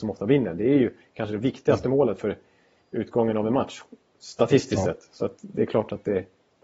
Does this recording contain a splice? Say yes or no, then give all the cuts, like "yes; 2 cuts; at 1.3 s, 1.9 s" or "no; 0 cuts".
no; 0 cuts